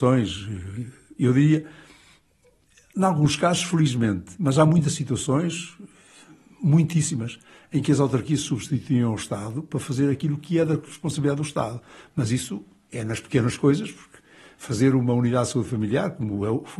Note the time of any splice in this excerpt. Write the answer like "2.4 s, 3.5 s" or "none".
none